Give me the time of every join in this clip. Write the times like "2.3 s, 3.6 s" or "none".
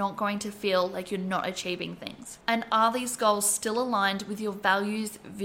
2.4 s